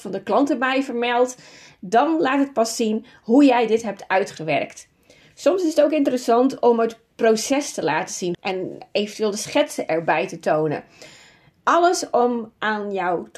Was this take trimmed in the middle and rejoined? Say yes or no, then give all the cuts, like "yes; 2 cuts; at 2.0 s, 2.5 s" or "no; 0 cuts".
yes; 1 cut; at 8.3 s